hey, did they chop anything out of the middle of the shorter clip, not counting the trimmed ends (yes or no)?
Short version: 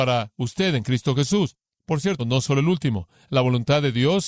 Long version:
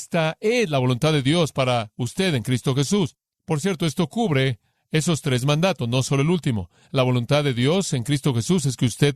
yes